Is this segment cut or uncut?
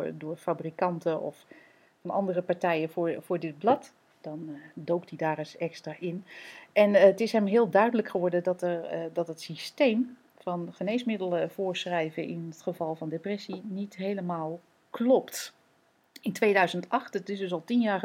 uncut